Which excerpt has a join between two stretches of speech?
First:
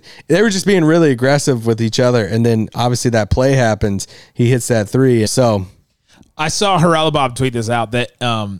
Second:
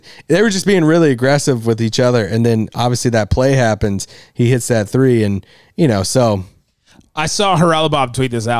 first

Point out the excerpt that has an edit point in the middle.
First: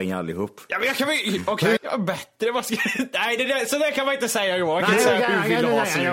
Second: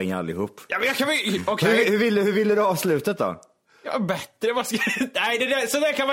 first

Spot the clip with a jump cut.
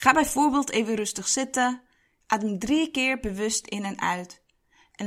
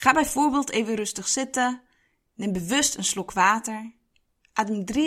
first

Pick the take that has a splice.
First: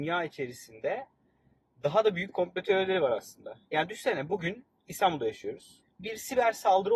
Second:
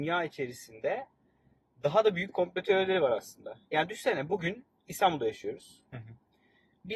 first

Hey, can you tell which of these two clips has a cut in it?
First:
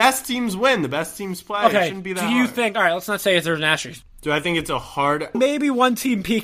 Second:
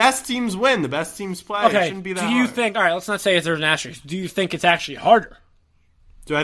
first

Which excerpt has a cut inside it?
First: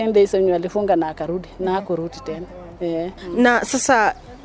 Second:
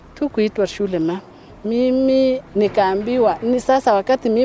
second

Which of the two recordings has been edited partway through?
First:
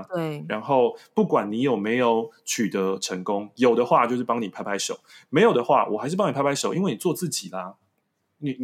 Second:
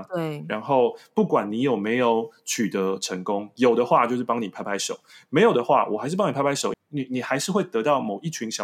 second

